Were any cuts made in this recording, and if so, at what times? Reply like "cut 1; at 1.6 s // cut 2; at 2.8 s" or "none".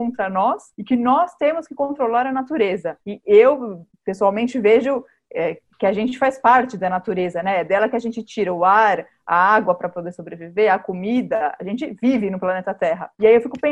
none